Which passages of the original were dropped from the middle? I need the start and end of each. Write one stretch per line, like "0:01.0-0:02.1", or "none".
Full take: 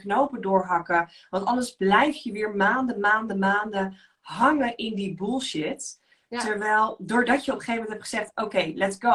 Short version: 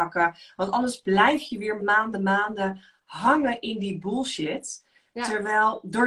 0:02.5-0:02.9